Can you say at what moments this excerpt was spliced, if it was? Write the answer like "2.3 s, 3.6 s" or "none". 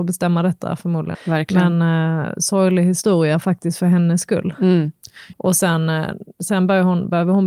1.1 s, 5.3 s